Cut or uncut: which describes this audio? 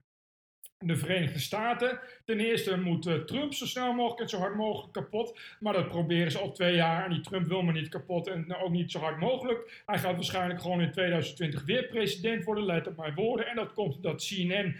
uncut